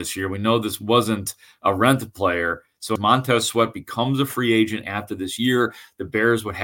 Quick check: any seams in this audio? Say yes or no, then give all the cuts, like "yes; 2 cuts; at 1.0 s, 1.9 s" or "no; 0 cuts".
yes; 1 cut; at 3.0 s